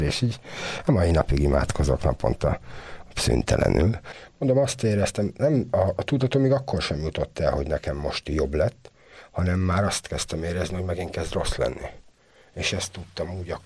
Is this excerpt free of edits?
yes; 0 cuts

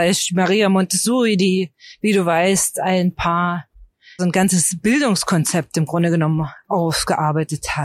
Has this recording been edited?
yes; 1 cut; at 4.2 s

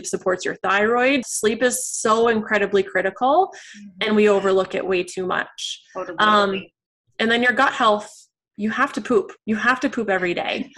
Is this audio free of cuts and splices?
no; 1 cut; at 1.2 s

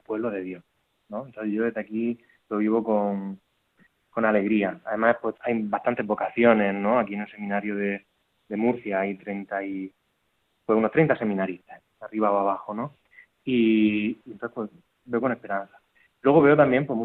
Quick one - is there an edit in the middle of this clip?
yes; 1 cut; at 5.3 s

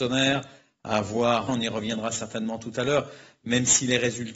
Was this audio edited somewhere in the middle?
yes; 1 cut; at 1.5 s

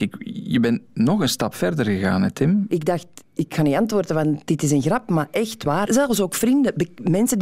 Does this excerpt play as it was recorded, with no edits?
no; 2 cuts; at 2.7 s, 5.9 s

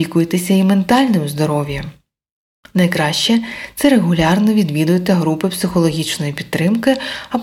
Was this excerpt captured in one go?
yes; 0 cuts

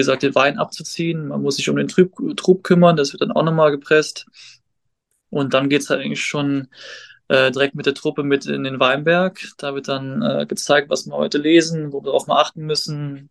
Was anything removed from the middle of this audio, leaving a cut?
no; 0 cuts

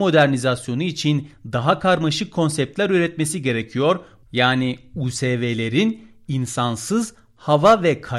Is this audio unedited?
no; 1 cut; at 4.2 s

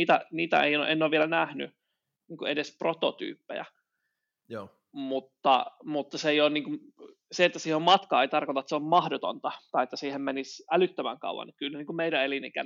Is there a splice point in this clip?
no; 0 cuts

